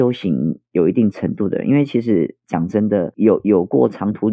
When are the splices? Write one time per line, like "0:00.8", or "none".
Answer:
none